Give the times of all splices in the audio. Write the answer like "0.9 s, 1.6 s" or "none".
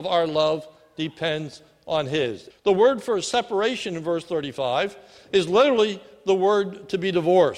2.5 s